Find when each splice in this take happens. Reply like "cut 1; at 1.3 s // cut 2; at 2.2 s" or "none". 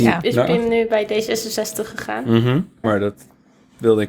cut 1; at 2.8 s

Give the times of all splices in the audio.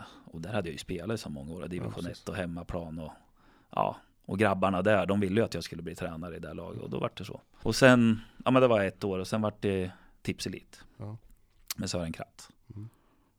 cut 1; at 7.6 s

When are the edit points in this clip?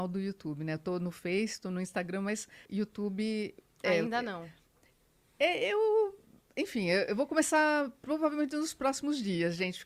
cut 1; at 2.7 s

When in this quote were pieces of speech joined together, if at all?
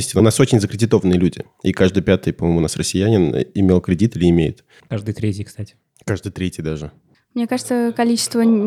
cut 1; at 4.8 s

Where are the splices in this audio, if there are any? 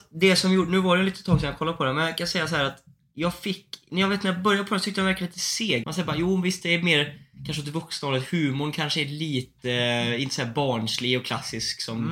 cut 1; at 5.8 s

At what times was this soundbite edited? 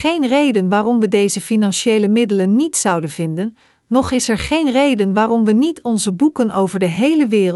none

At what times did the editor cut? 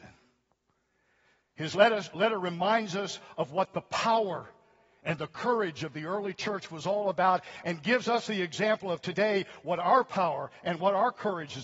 none

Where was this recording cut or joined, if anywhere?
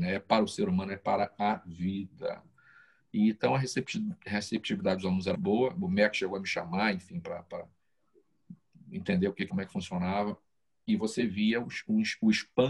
cut 1; at 5.3 s // cut 2; at 9.5 s

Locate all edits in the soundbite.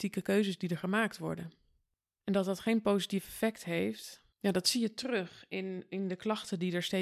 cut 1; at 4.3 s

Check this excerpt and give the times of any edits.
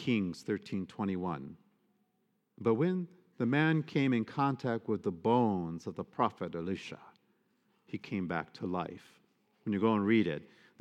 none

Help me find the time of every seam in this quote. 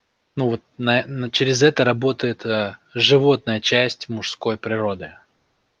none

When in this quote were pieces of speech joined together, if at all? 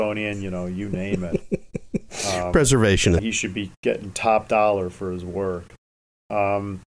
cut 1; at 3.2 s

